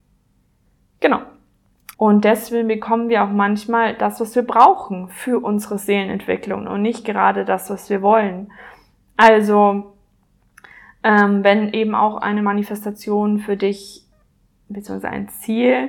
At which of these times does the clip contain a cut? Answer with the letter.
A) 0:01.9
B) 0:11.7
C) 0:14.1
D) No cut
A